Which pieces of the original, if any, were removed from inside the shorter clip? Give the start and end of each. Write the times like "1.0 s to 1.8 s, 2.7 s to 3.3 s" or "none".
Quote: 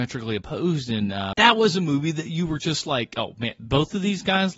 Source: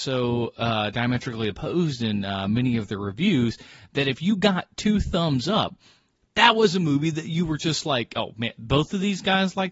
2.5 s to 6.3 s